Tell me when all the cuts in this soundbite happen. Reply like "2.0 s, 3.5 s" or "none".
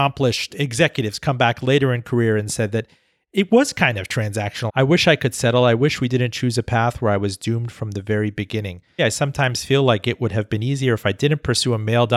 4.7 s, 9.0 s